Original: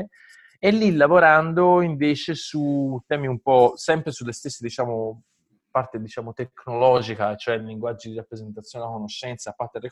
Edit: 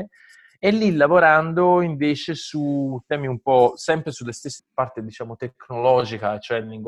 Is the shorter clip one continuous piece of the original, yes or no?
no